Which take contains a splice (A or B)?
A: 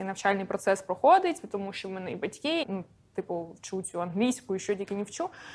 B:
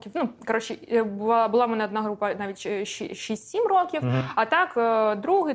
A